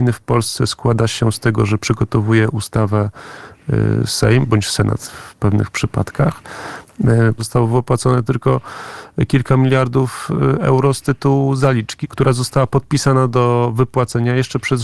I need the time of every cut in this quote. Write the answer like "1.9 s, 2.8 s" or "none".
7.4 s, 12.0 s